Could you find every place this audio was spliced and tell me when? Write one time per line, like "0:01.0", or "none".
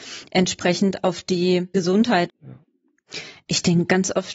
0:02.3